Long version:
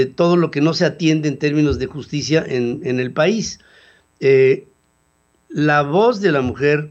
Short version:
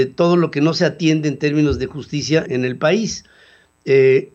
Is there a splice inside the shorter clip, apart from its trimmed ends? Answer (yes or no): yes